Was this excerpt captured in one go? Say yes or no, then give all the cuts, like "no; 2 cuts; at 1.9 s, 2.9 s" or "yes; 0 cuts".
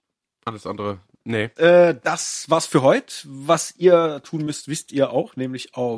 no; 1 cut; at 1.6 s